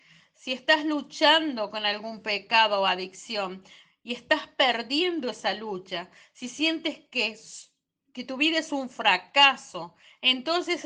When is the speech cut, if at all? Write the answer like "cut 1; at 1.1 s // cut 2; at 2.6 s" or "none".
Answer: none